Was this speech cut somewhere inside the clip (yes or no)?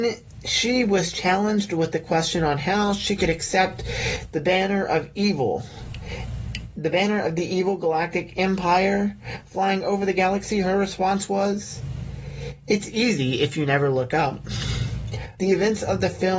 yes